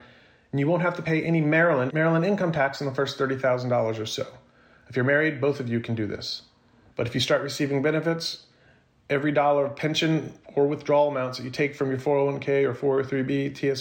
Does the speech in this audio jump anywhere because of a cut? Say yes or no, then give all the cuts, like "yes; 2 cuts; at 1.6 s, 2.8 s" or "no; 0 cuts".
yes; 2 cuts; at 1.9 s, 6.9 s